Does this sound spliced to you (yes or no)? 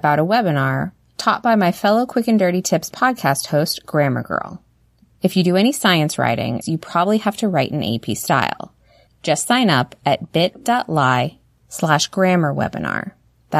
yes